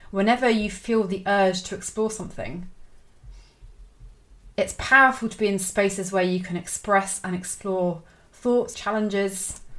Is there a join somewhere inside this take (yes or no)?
yes